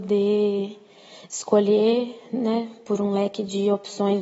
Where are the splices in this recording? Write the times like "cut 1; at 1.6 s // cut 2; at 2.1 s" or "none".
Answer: none